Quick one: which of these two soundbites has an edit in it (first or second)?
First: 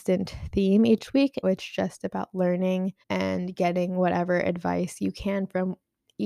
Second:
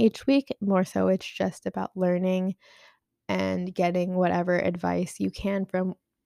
first